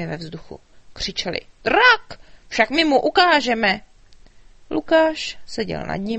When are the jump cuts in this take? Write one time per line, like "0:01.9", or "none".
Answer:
none